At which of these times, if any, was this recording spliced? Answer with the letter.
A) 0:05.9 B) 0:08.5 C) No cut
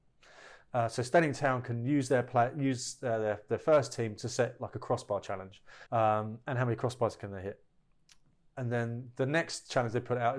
A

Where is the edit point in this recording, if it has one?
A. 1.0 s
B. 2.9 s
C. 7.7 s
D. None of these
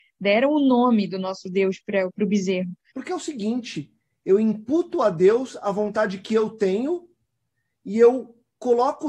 B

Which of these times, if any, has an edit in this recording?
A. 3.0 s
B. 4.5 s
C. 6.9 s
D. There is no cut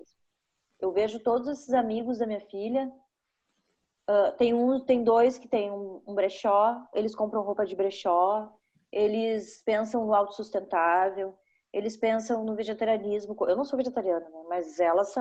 C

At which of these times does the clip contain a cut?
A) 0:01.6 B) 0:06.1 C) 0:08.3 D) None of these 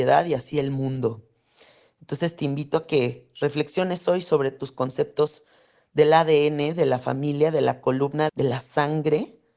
C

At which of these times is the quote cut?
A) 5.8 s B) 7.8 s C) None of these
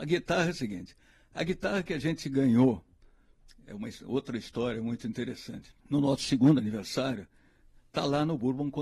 A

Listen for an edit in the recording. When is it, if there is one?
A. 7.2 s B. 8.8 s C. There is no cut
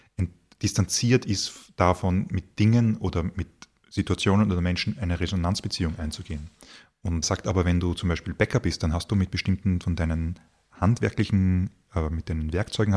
A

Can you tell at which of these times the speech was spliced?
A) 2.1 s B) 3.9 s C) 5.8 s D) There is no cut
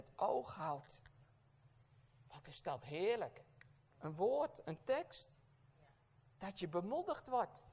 B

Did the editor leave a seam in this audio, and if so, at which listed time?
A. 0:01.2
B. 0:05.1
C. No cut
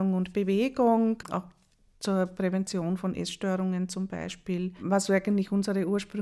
A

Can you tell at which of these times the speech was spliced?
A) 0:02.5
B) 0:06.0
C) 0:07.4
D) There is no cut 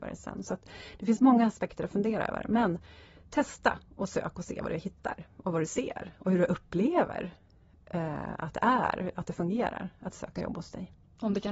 D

